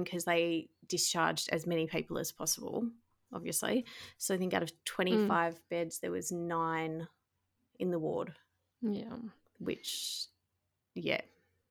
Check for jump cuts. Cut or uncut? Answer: uncut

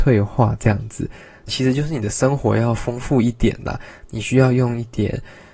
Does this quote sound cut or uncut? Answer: cut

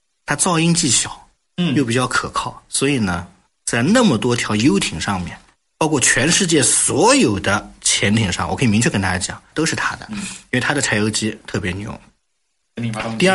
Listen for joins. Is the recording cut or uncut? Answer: cut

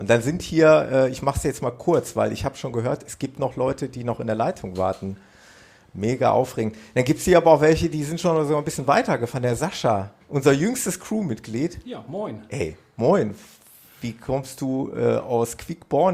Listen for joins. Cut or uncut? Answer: uncut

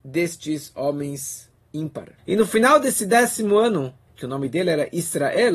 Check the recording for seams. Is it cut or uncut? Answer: cut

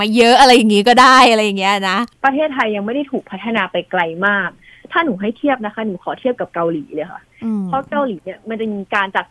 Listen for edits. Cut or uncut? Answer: uncut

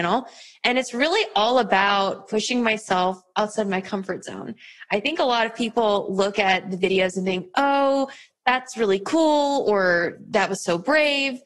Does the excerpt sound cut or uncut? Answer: uncut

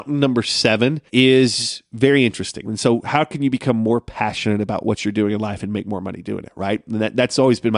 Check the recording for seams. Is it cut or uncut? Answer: cut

